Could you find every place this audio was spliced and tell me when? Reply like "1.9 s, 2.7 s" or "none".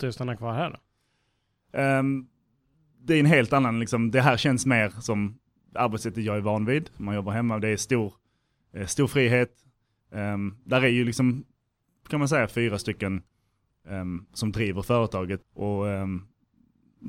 15.4 s